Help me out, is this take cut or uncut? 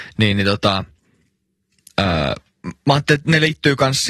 uncut